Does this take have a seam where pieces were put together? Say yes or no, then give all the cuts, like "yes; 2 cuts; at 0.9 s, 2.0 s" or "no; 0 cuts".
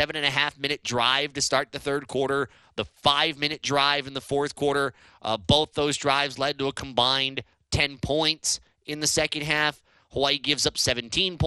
no; 0 cuts